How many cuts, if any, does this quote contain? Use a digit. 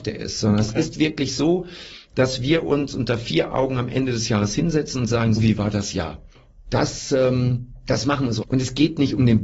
3